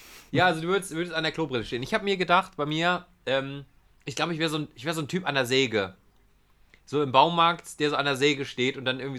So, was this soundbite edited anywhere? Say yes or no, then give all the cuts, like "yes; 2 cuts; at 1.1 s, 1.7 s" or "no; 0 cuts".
no; 0 cuts